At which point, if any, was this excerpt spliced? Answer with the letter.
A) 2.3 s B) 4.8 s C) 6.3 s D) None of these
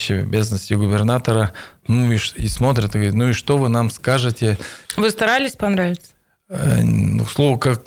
B